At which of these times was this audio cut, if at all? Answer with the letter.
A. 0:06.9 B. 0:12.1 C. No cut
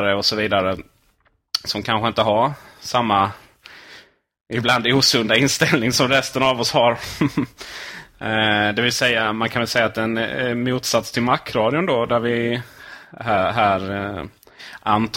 C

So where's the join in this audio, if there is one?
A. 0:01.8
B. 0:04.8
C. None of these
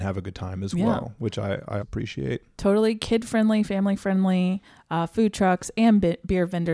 A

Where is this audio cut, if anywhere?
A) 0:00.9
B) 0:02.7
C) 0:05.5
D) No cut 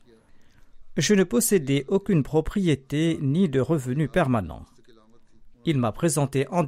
C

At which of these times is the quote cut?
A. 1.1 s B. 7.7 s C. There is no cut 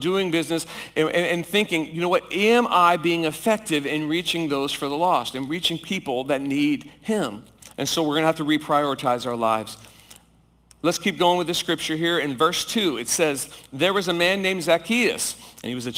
B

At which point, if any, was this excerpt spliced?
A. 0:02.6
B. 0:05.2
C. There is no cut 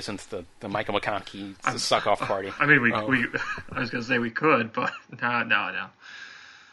A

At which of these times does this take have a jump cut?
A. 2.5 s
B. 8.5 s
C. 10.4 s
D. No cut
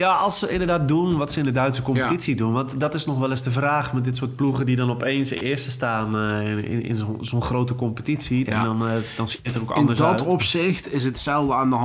B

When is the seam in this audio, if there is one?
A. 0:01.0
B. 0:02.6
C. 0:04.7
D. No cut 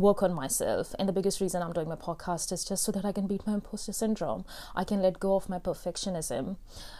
D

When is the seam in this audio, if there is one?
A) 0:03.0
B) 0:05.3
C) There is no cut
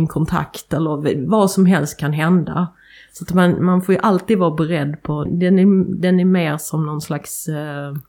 B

